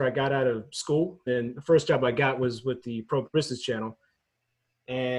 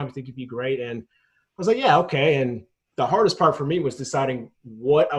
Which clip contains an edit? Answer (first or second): first